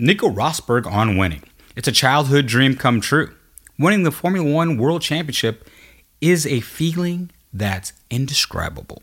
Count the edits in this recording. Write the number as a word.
zero